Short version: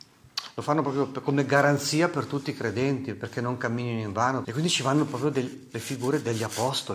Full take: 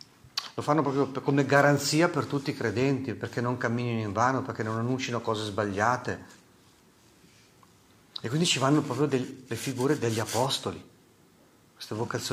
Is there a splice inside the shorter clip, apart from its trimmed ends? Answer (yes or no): yes